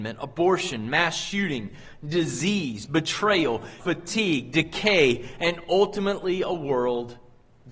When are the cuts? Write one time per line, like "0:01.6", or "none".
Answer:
0:03.8